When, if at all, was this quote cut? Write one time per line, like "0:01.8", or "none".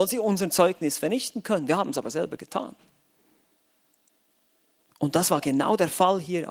none